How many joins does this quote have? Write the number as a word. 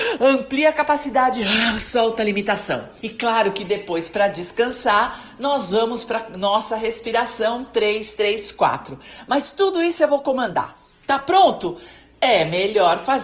one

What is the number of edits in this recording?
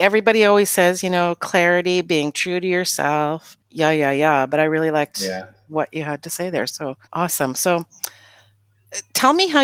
two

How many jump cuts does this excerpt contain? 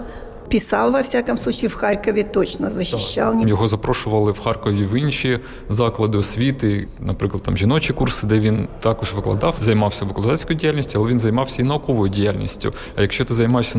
two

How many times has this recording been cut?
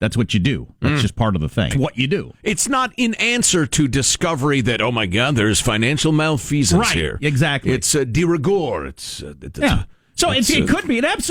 one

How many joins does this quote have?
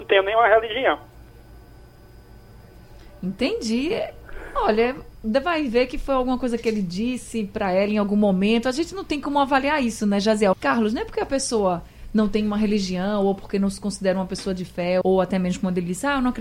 two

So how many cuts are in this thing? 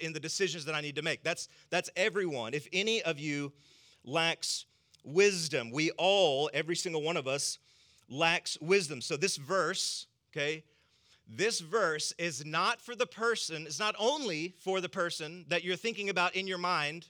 zero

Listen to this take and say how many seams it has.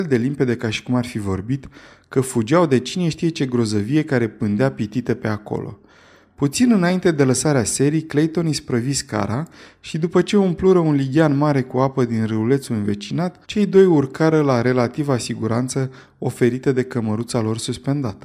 one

